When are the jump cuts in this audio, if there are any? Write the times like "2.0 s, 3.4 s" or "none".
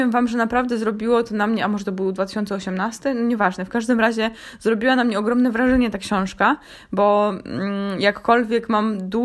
none